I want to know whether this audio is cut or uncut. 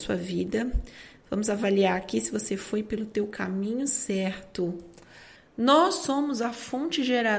cut